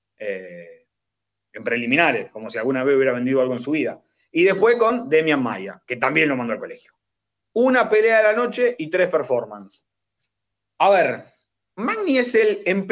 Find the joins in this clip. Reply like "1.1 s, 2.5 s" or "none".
7.4 s